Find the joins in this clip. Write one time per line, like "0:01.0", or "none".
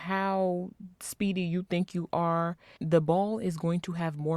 0:02.8